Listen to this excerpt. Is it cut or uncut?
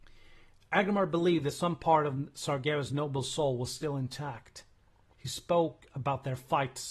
cut